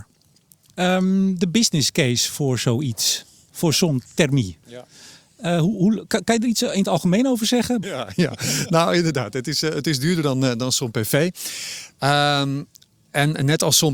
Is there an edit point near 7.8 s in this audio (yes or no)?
yes